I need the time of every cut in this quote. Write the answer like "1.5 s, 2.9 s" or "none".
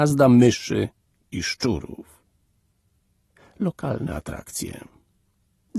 none